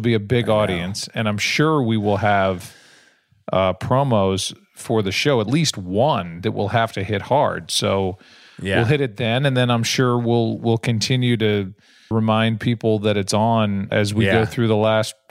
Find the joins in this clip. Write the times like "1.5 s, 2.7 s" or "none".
12.1 s, 13.9 s

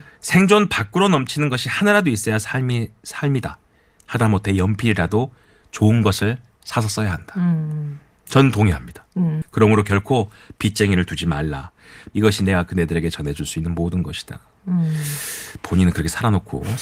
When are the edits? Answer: 9.4 s, 12.1 s

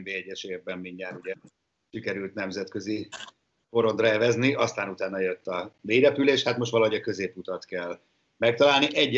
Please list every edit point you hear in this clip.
none

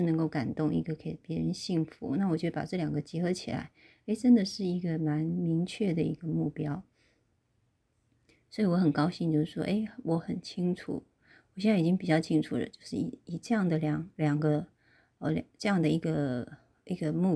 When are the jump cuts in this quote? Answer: none

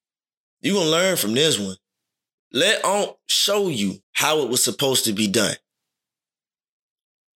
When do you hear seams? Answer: 2.3 s, 4.0 s

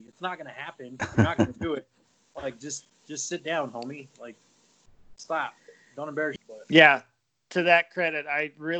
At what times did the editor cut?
6.4 s

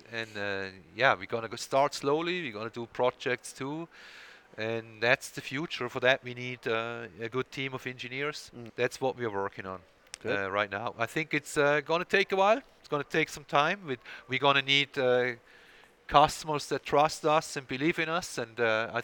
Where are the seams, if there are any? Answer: 8.7 s

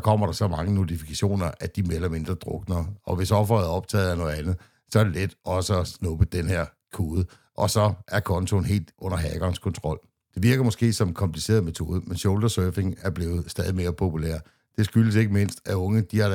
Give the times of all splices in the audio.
none

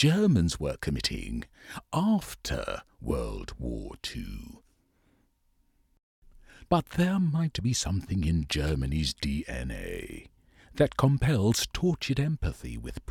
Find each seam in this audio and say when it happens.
6.7 s

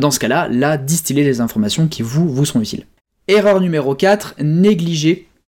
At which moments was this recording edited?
none

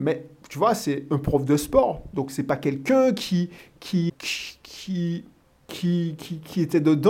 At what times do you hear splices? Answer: 4.1 s

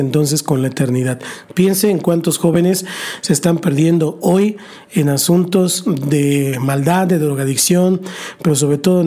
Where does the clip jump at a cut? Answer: none

